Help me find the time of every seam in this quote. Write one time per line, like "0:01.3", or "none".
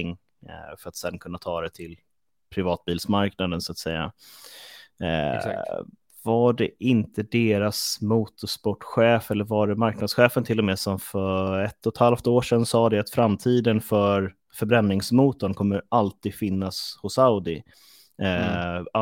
none